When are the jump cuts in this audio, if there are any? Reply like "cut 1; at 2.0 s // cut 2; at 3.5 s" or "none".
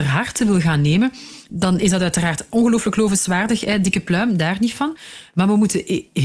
none

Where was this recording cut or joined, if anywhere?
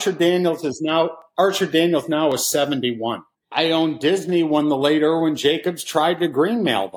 cut 1; at 3.3 s

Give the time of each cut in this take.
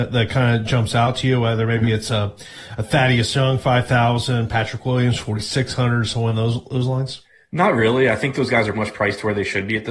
cut 1; at 8.7 s

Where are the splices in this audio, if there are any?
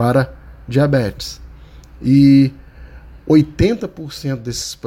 none

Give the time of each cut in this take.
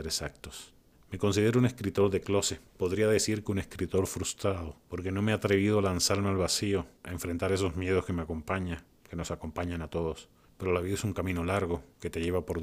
none

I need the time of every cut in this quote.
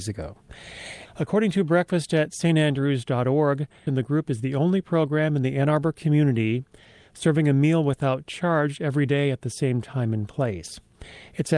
cut 1; at 1.1 s // cut 2; at 3.9 s

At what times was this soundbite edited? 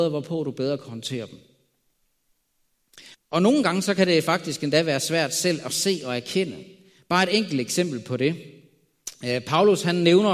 cut 1; at 3.1 s

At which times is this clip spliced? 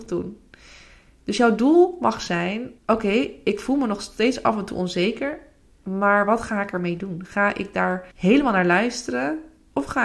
cut 1; at 2.8 s // cut 2; at 8.1 s

